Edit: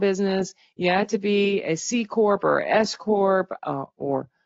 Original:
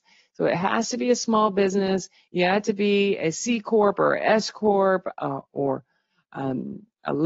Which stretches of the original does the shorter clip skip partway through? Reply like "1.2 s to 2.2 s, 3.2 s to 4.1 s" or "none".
none

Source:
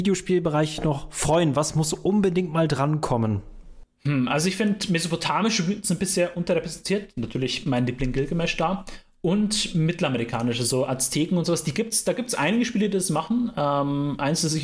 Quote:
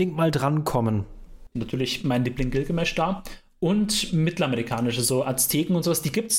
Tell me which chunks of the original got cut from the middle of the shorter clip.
3.9 s to 7.1 s

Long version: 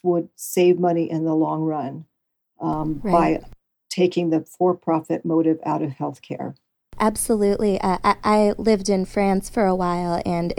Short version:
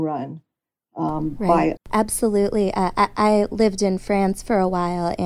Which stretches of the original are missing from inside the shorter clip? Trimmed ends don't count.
3.4 s to 6.8 s

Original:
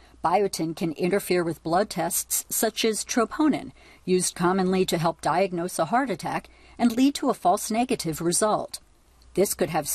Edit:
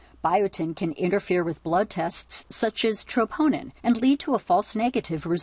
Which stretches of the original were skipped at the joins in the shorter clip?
3.8 s to 6.7 s

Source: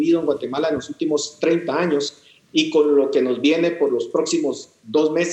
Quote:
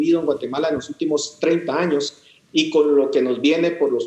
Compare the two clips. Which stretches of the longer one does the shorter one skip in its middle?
none

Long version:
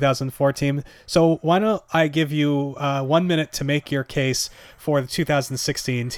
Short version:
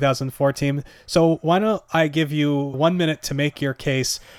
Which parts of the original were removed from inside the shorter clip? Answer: 2.7 s to 3.0 s

